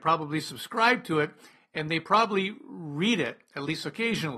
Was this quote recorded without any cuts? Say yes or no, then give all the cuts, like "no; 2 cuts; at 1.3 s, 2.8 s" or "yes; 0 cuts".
yes; 0 cuts